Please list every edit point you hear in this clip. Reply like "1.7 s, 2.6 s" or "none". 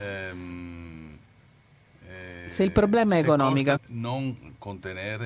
3.8 s